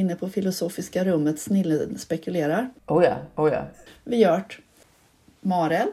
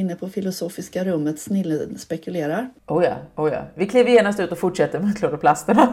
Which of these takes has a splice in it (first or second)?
first